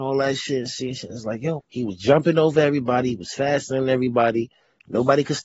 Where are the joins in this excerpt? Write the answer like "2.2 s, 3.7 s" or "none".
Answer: 1.6 s